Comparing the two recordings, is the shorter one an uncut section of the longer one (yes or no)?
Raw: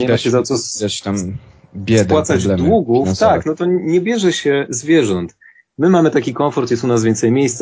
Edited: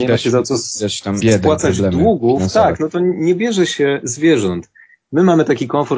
no